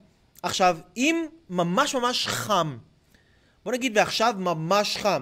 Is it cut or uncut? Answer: uncut